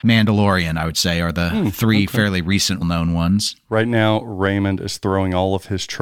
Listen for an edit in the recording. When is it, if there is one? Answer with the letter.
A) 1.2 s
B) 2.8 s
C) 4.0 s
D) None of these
B